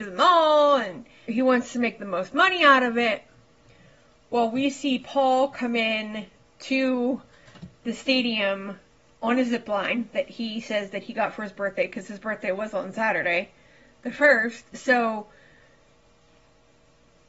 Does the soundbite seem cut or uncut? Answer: cut